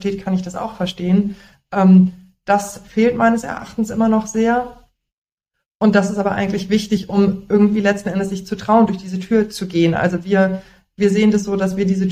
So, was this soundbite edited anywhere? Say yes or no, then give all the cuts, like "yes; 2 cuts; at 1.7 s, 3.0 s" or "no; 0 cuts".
no; 0 cuts